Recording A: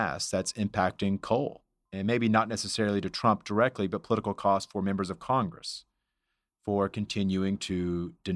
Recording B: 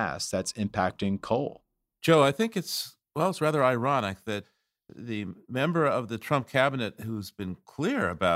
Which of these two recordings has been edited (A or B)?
A